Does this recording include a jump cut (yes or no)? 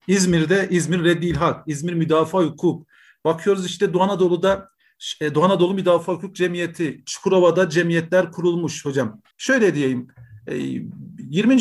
yes